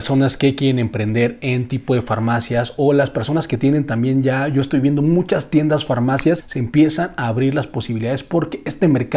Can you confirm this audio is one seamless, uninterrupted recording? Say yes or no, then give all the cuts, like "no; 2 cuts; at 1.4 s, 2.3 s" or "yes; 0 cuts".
no; 1 cut; at 6.4 s